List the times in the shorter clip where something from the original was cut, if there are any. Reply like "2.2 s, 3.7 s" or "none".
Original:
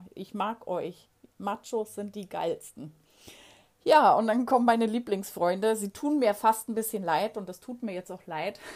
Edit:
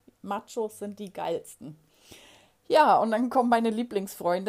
none